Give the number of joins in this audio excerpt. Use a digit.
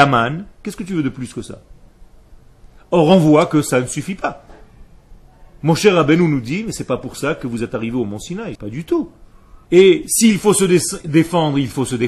2